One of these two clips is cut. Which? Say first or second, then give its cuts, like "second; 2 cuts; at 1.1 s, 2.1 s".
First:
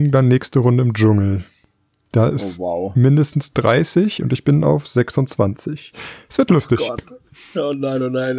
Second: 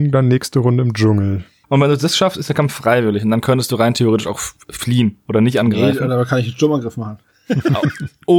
second; 1 cut; at 1.6 s